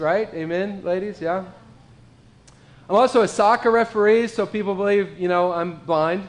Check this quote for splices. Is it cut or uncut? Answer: uncut